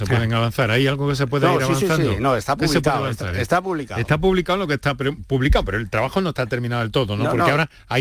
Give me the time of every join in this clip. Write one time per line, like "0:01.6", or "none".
none